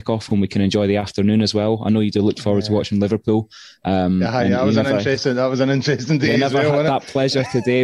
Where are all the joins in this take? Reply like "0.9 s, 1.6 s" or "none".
none